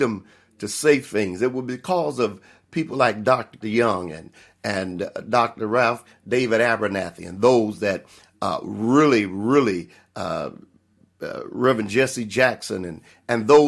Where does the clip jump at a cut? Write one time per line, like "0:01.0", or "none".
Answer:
0:03.6